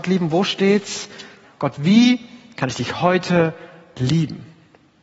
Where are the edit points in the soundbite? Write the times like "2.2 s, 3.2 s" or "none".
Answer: 1.4 s